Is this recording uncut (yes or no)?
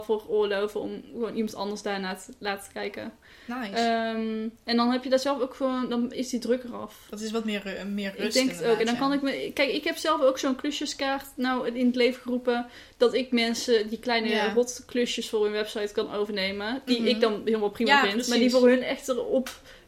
yes